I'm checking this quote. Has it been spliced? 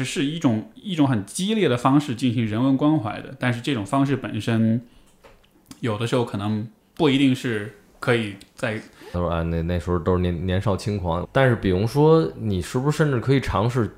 yes; 3 cuts; at 7.0 s, 9.1 s, 11.2 s

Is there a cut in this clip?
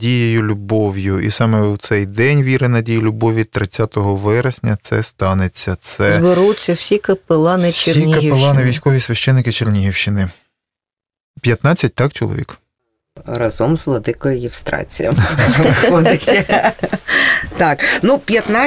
no; 0 cuts

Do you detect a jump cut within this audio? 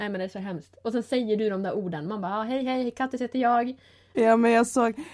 yes; 1 cut; at 4.1 s

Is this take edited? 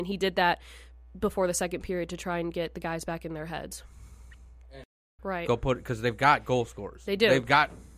yes; 1 cut; at 5.2 s

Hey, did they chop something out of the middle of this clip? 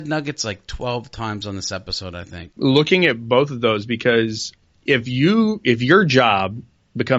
yes; 1 cut; at 2.6 s

